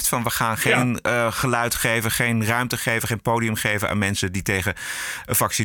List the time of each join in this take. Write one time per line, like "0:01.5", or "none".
none